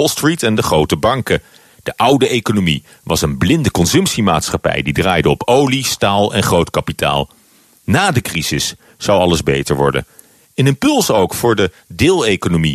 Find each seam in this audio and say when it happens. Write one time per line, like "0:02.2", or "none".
0:10.4